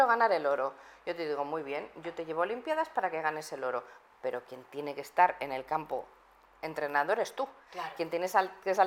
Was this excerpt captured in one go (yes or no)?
yes